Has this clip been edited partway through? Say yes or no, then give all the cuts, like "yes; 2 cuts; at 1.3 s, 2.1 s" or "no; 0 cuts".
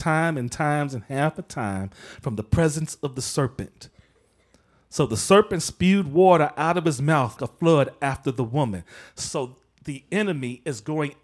yes; 1 cut; at 7.4 s